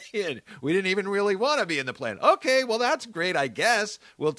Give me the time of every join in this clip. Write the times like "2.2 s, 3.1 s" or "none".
none